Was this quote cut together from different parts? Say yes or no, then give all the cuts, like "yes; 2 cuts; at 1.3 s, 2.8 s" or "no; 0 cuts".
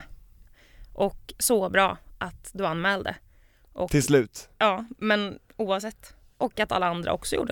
no; 0 cuts